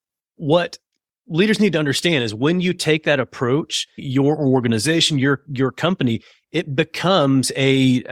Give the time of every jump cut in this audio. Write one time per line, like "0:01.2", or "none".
0:04.0